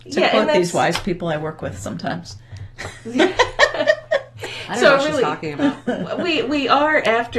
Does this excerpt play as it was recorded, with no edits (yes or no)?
yes